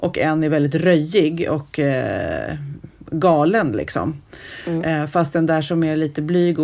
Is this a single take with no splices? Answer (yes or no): yes